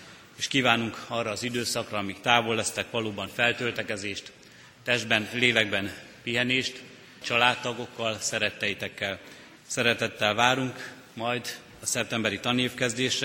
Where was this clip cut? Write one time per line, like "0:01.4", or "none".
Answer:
0:07.2
0:09.6